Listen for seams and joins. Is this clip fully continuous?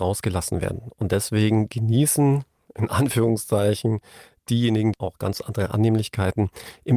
no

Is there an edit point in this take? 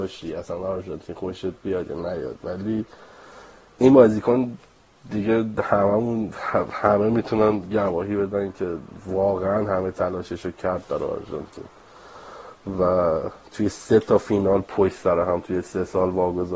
no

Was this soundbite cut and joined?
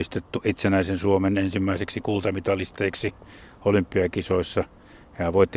no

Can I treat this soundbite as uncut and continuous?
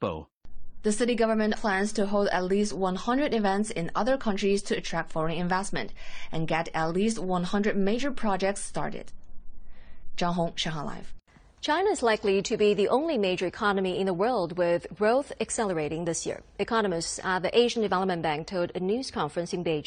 no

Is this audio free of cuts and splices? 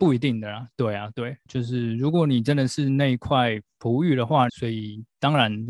no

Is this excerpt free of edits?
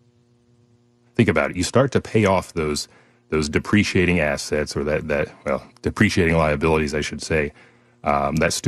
yes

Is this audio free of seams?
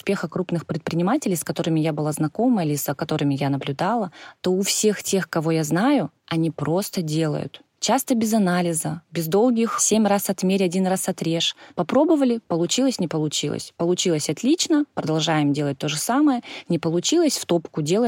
yes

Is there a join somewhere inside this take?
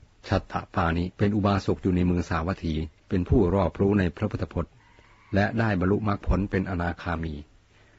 yes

